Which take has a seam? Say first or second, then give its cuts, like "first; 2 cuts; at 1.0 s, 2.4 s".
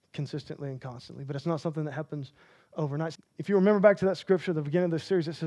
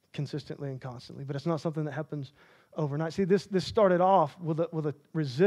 first; 1 cut; at 3.1 s